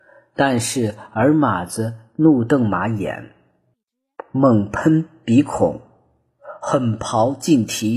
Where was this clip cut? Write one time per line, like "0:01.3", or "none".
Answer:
none